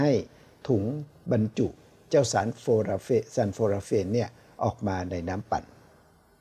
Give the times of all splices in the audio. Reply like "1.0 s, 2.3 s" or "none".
none